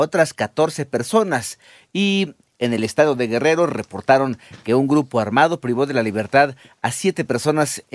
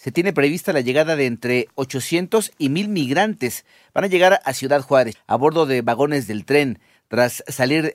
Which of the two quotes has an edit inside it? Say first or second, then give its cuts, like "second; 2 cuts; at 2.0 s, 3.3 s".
second; 1 cut; at 5.1 s